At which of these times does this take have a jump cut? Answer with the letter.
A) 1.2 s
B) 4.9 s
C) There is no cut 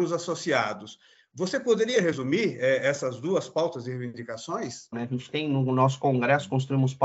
B